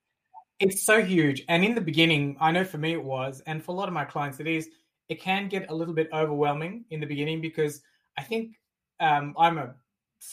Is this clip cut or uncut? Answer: cut